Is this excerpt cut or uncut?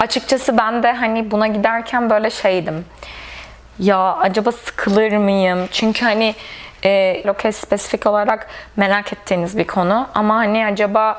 cut